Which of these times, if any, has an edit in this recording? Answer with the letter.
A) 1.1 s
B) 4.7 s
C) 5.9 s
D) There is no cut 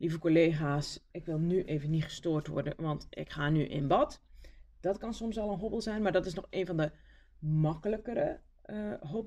A